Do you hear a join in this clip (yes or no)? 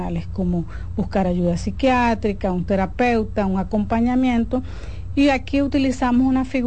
no